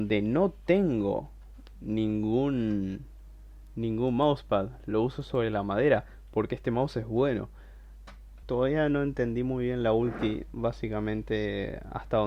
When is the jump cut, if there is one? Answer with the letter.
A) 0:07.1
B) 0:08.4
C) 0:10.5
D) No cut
B